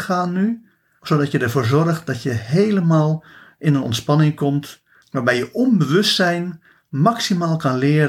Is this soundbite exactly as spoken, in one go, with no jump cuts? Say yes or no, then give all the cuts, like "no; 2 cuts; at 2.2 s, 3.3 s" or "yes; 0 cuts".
no; 1 cut; at 5.0 s